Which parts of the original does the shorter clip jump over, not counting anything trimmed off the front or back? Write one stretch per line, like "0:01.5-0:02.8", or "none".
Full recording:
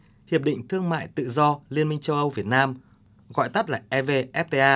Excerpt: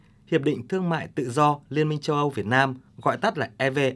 0:02.9-0:03.2